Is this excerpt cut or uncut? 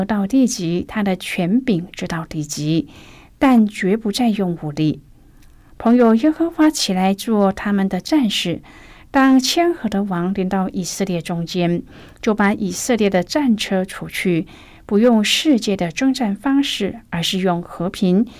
uncut